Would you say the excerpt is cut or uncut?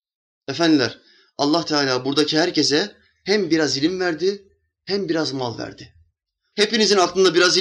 cut